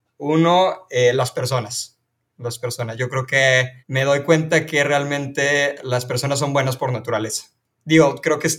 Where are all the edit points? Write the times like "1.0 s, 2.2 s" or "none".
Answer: 3.8 s